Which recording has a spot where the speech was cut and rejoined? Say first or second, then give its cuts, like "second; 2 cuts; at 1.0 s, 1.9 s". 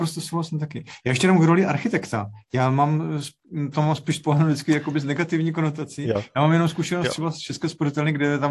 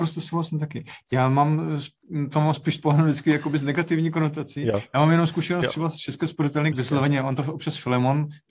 second; 2 cuts; at 1.0 s, 6.7 s